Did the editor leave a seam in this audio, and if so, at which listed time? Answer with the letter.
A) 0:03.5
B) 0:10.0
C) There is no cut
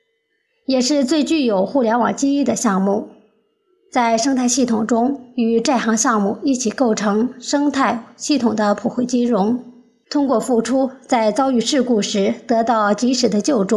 B